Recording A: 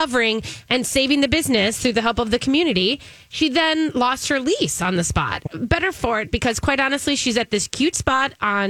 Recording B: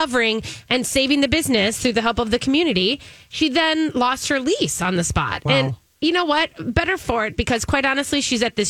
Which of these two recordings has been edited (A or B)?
A